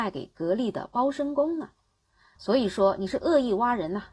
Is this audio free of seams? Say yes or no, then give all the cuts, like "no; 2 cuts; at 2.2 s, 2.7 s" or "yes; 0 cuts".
no; 1 cut; at 2.4 s